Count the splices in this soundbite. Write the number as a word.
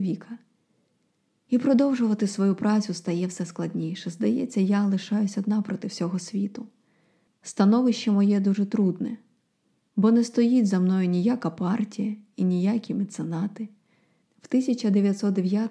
two